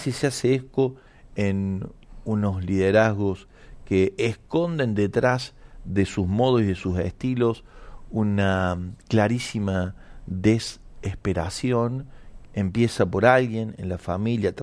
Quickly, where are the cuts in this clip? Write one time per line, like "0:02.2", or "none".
0:12.4